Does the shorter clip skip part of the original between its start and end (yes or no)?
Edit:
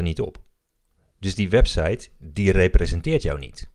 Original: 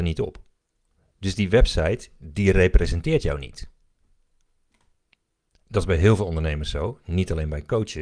no